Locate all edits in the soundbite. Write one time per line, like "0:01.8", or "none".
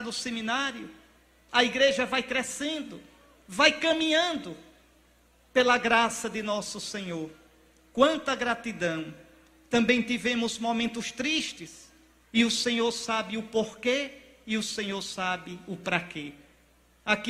0:01.5